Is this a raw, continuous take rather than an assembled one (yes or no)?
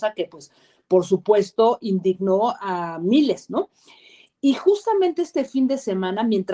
yes